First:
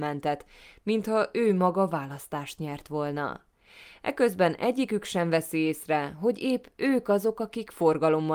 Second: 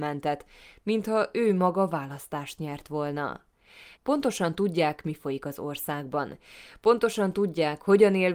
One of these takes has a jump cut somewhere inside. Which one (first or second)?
second